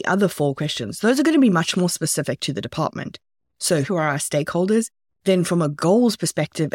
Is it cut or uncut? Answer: cut